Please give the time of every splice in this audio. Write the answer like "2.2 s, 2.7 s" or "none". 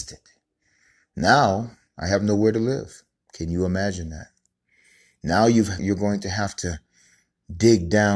5.8 s